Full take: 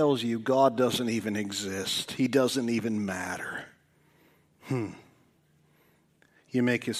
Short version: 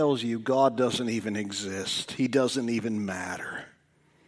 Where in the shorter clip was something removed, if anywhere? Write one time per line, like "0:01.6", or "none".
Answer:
none